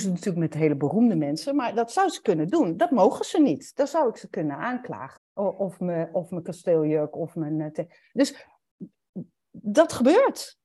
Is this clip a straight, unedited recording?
no; 1 cut; at 5.2 s

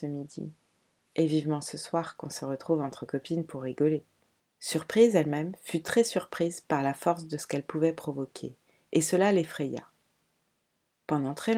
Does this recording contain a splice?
yes; 1 cut; at 4.4 s

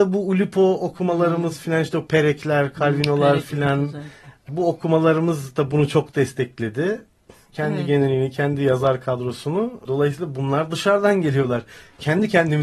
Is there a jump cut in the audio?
yes; 3 cuts; at 4.5 s, 7.5 s, 9.9 s

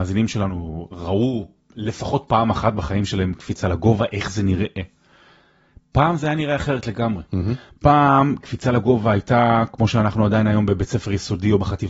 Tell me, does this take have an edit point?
no; 0 cuts

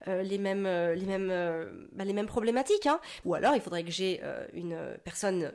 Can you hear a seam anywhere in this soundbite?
yes; 1 cut; at 3.2 s

